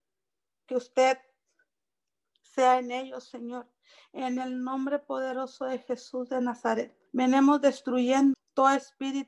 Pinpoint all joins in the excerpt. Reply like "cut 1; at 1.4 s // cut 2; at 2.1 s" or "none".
cut 1; at 7.1 s // cut 2; at 8.3 s